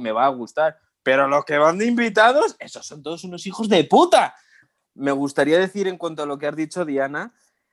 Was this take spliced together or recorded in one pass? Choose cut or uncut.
cut